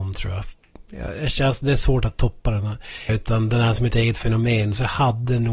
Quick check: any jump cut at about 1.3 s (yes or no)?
no